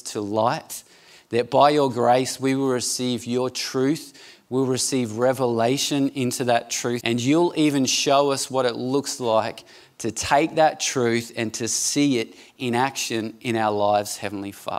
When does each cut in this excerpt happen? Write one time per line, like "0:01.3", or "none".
0:07.0